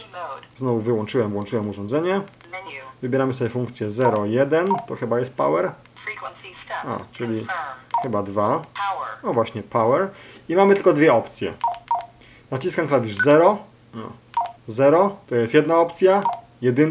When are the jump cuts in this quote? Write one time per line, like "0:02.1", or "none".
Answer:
none